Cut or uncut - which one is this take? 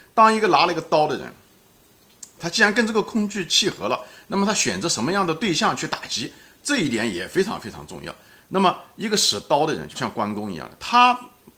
cut